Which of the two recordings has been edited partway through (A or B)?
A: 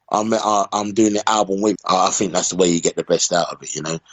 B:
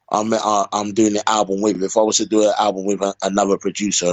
A